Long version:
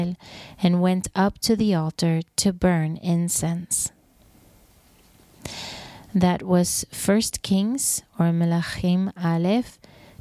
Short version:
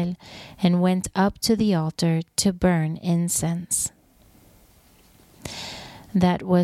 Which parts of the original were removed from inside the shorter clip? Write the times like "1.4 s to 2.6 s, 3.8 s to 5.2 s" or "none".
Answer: none

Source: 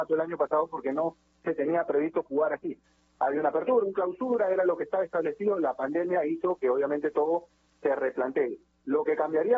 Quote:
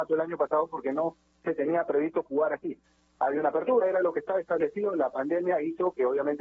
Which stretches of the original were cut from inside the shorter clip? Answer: 3.8 s to 4.4 s

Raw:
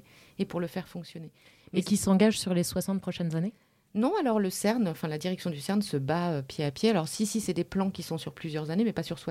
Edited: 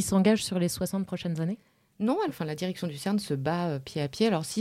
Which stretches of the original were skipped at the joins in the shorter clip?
4.2 s to 4.9 s

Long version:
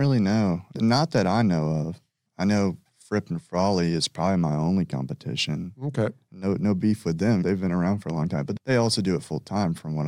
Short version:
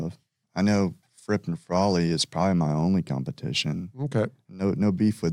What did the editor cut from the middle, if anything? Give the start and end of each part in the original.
none

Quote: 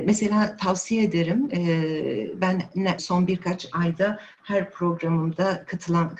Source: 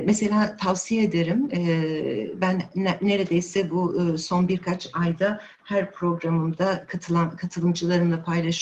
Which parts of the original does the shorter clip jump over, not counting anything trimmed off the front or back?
3.0 s to 4.2 s

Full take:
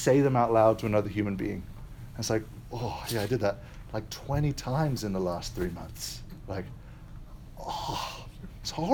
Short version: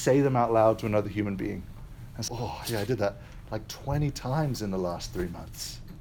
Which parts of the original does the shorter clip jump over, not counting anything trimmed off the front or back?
2.3 s to 2.7 s

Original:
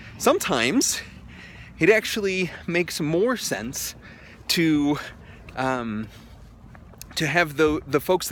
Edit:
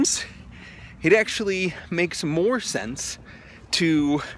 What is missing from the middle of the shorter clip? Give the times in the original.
none

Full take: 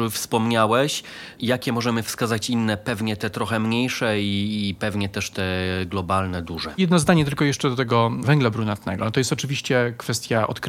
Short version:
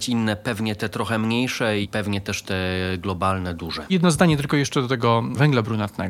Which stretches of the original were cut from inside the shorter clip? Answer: 4.2 s to 4.7 s

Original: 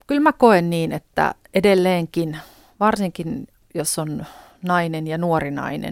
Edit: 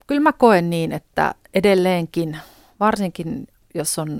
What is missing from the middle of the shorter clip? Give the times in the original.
none

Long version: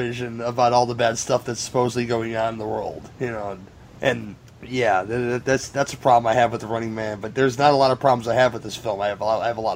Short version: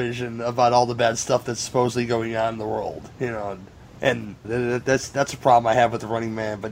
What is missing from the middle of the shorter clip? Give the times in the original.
4.4 s to 5.0 s

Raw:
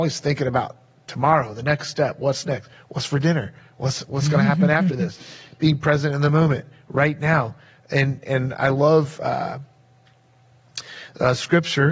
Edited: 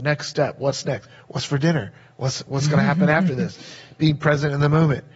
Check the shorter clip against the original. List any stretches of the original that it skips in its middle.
none

